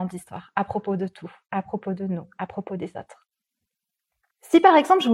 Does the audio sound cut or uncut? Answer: uncut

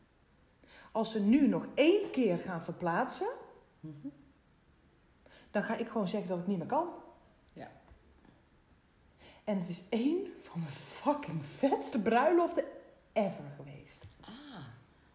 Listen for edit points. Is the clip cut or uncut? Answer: uncut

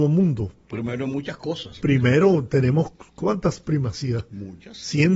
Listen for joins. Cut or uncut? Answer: uncut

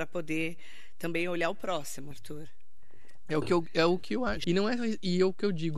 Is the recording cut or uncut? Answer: cut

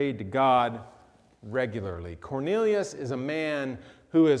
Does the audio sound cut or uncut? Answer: uncut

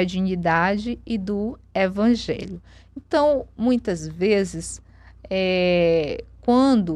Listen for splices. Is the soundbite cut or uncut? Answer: uncut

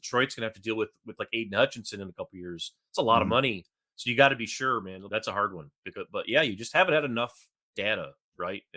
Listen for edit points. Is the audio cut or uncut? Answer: cut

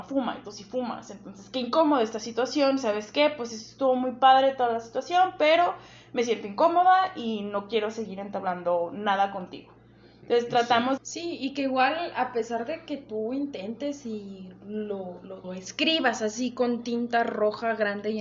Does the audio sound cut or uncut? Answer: cut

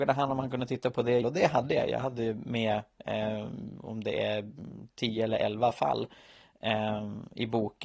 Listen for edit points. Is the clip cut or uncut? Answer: cut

